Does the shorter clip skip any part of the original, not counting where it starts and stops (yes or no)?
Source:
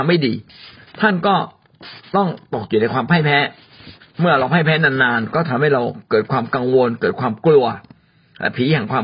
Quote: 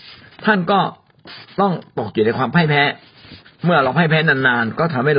no